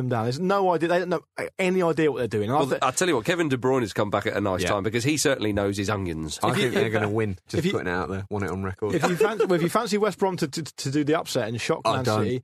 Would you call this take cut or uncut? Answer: uncut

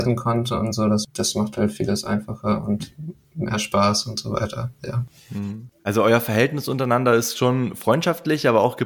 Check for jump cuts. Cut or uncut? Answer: uncut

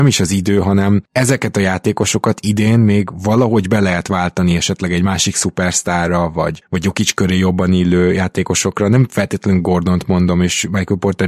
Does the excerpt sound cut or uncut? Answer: uncut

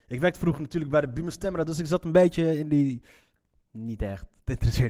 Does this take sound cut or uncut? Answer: uncut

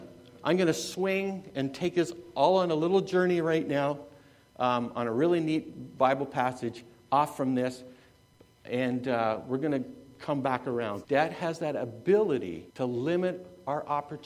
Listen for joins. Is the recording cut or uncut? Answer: cut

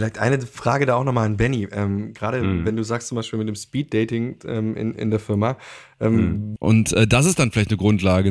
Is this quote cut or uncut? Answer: cut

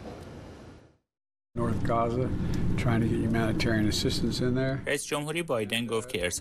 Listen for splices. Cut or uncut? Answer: uncut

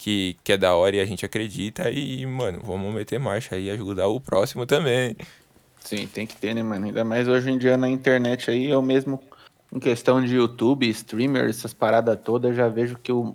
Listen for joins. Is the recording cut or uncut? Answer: cut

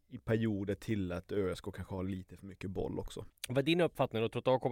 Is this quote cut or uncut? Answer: cut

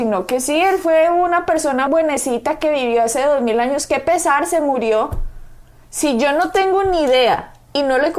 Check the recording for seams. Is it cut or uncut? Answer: cut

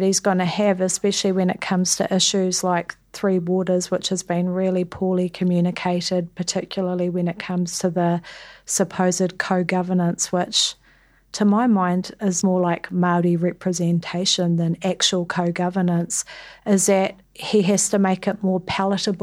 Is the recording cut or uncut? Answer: cut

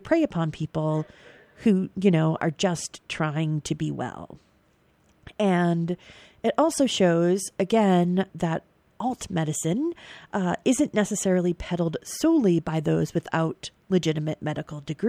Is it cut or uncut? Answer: cut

